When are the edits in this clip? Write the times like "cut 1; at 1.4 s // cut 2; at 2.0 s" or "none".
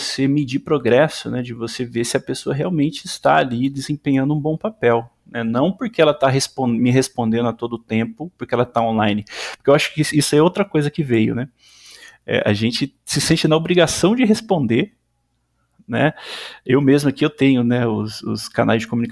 none